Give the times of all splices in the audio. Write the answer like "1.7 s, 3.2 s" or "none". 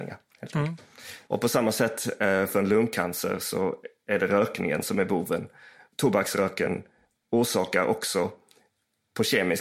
1.3 s